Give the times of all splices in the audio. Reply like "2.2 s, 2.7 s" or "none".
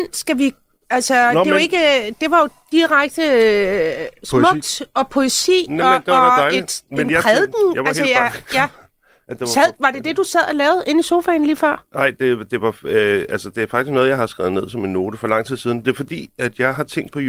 none